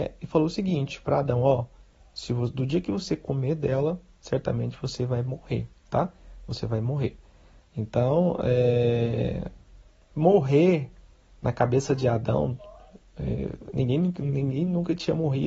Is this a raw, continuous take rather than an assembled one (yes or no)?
yes